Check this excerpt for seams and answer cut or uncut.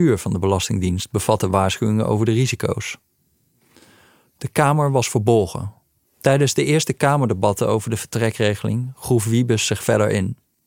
cut